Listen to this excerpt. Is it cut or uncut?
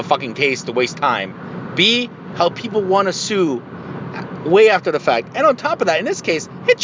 uncut